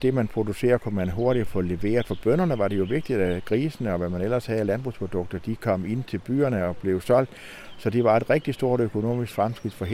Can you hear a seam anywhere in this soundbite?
no; 0 cuts

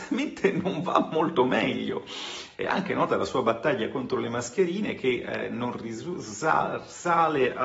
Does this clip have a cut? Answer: yes; 1 cut; at 2.5 s

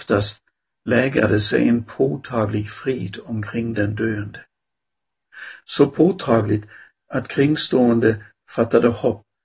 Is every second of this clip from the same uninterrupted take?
yes; 0 cuts

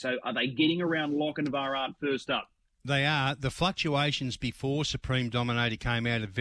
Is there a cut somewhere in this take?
no; 0 cuts

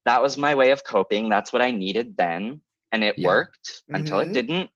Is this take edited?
no; 0 cuts

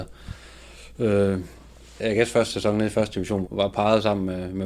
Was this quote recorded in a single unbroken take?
no; 2 cuts; at 2.0 s, 3.4 s

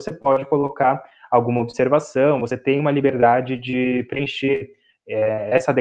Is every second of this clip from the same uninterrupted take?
yes; 0 cuts

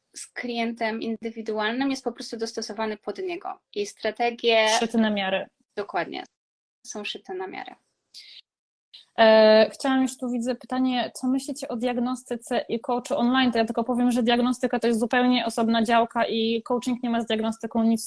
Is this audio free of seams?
yes; 0 cuts

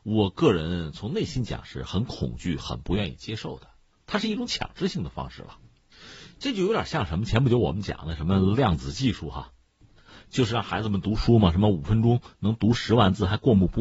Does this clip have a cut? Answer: no; 0 cuts

